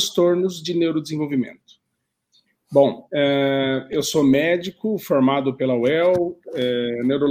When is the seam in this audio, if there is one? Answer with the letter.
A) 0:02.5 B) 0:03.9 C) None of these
A